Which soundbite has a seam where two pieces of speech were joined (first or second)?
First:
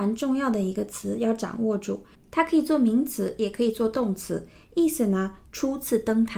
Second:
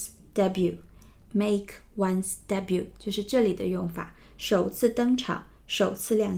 first